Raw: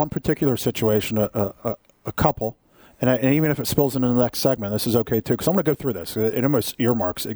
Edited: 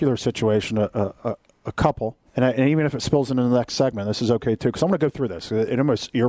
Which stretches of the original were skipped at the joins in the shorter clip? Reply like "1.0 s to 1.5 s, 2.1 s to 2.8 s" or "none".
2.7 s to 2.9 s